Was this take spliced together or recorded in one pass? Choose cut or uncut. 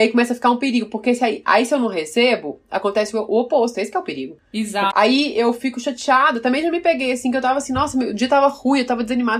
cut